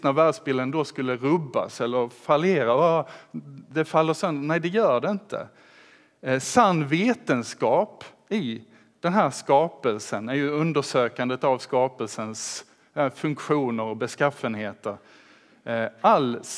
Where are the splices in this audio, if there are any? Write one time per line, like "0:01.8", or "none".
none